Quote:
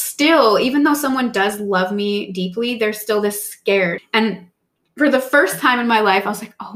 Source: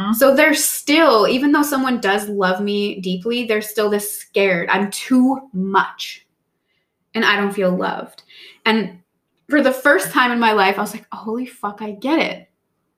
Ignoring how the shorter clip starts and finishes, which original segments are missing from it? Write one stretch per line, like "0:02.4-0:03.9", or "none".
0:04.7-0:08.5